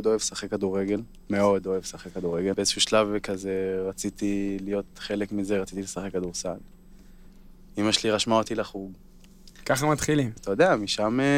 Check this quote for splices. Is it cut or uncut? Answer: cut